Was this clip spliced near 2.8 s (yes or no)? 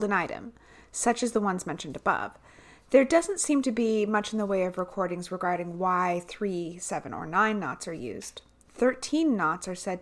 no